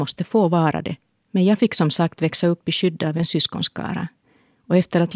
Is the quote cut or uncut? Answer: cut